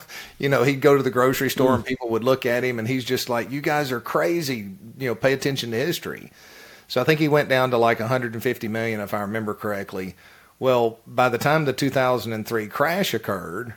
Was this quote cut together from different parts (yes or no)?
no